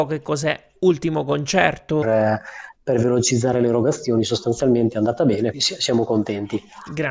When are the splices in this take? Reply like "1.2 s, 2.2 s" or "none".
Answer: 2.0 s, 5.5 s